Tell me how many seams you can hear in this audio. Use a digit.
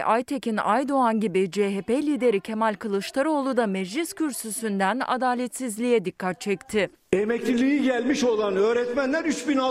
1